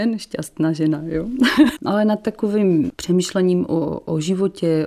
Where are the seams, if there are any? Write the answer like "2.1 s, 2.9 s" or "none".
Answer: 1.8 s